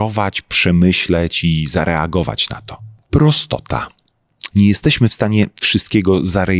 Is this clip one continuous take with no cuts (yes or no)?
no